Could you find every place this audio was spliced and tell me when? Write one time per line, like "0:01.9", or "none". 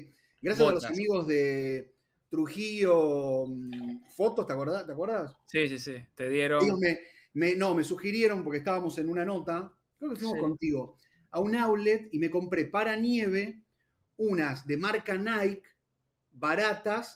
none